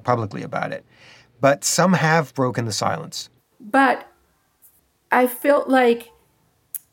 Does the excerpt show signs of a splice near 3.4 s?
yes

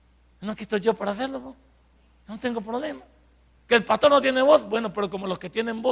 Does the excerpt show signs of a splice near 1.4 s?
no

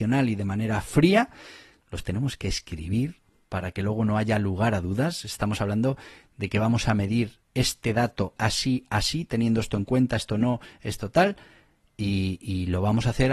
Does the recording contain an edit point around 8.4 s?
yes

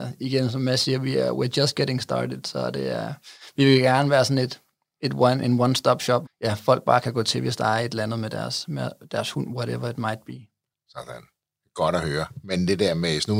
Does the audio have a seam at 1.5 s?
no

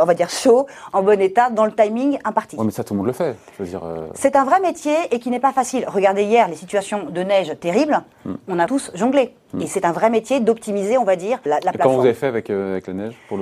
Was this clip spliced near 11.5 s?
yes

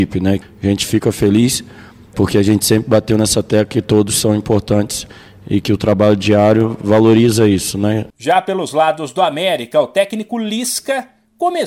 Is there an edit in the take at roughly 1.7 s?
no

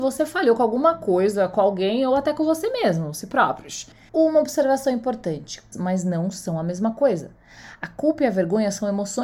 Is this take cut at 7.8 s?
no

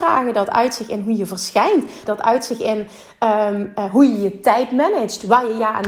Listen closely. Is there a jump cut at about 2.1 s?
yes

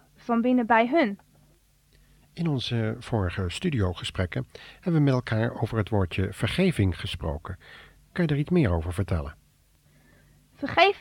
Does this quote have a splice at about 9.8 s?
no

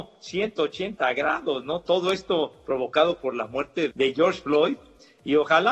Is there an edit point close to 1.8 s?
no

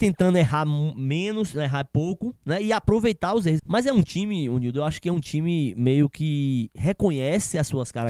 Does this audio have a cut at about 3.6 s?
yes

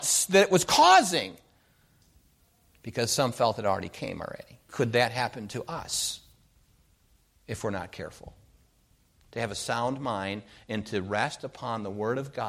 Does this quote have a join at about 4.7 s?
yes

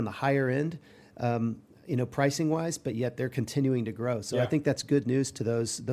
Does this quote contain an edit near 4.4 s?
no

